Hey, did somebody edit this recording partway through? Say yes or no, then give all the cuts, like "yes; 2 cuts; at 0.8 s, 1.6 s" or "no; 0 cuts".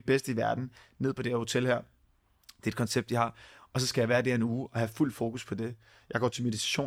no; 0 cuts